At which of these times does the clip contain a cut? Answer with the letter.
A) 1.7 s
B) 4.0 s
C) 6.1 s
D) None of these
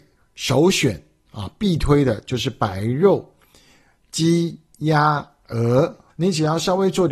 C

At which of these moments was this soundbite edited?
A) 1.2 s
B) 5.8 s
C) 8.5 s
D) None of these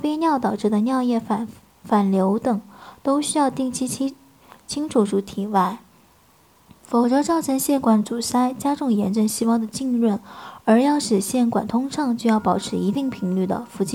D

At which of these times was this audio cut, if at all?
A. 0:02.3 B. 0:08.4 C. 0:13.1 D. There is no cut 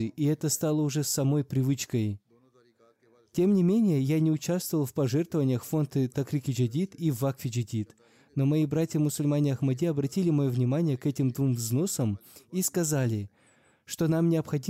D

